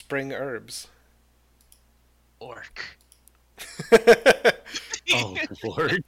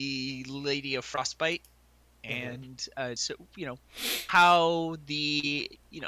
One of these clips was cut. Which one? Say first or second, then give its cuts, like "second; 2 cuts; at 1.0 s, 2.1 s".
second; 1 cut; at 3.2 s